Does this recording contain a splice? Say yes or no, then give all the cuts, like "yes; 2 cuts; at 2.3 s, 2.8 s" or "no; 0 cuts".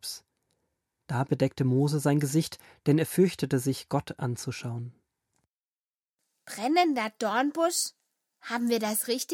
no; 0 cuts